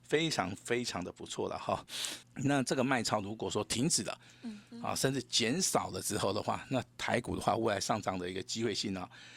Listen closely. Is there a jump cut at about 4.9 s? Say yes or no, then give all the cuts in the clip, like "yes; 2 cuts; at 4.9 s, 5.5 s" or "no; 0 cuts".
no; 1 cut; at 2.2 s